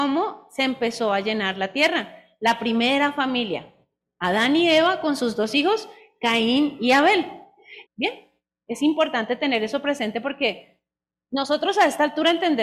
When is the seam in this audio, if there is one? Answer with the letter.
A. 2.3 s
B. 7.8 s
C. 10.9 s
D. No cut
B